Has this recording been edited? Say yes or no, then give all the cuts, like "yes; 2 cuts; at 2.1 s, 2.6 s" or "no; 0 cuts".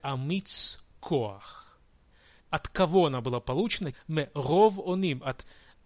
yes; 2 cuts; at 2.4 s, 3.9 s